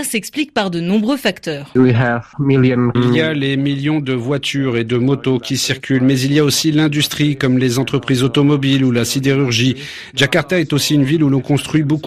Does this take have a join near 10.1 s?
no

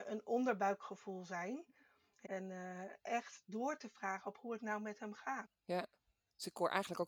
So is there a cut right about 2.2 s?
yes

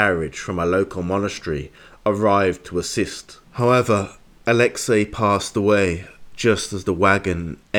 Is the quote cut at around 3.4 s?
yes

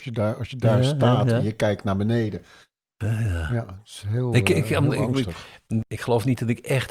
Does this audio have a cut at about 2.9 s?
yes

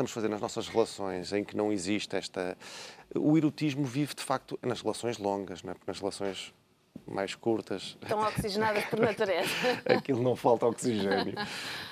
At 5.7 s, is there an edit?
no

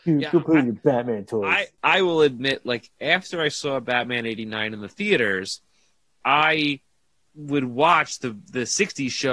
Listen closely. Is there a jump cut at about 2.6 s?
no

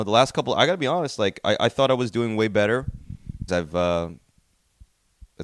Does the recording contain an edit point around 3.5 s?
yes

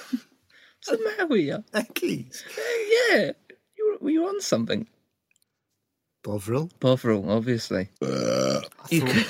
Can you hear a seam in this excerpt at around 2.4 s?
no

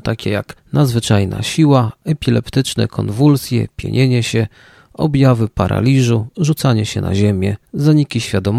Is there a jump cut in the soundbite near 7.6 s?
yes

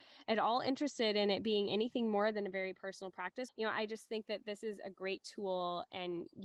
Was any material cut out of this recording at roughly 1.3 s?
no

